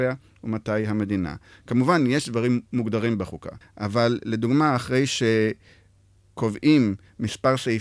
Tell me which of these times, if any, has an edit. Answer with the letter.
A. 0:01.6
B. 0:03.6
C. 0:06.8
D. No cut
B